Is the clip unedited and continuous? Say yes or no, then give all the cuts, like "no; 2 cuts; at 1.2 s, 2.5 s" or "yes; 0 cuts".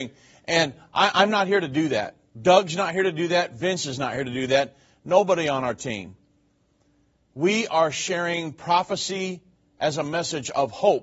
yes; 0 cuts